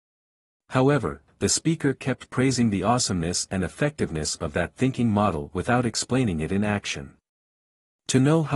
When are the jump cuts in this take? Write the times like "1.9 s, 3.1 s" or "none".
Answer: 1.3 s